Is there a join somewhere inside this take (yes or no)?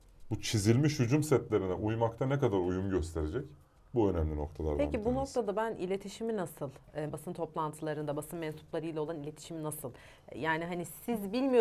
yes